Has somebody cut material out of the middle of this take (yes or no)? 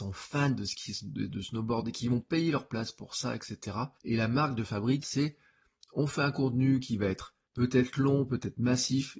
yes